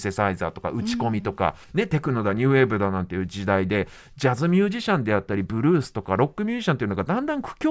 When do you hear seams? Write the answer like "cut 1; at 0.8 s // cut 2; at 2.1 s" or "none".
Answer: cut 1; at 1.6 s

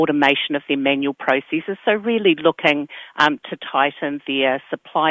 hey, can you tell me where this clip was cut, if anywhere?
none

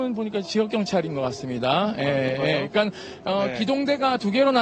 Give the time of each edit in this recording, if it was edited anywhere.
none

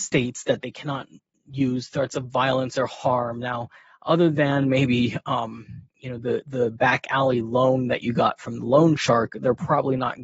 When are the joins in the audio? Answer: none

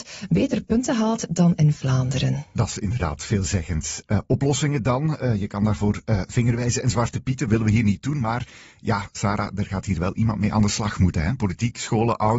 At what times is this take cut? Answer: none

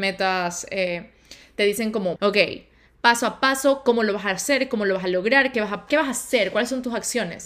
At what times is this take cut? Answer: cut 1; at 2.2 s // cut 2; at 5.9 s

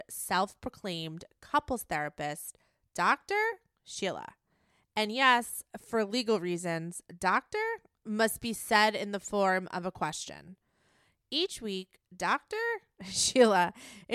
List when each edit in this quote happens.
none

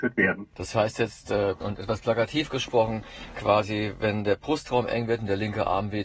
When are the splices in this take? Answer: cut 1; at 1.6 s

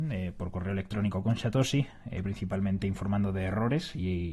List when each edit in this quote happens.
none

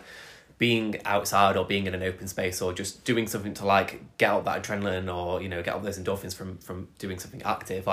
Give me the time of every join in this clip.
cut 1; at 3.0 s

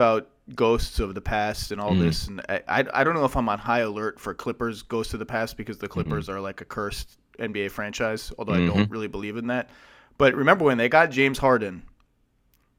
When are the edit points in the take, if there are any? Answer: none

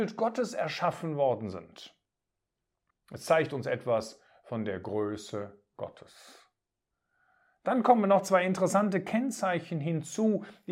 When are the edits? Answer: cut 1; at 2.9 s

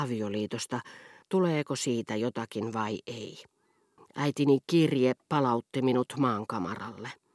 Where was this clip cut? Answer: cut 1; at 1.2 s // cut 2; at 4.0 s

